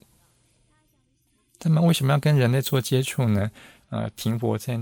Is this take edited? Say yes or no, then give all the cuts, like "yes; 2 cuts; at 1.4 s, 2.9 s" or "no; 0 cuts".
yes; 1 cut; at 3.8 s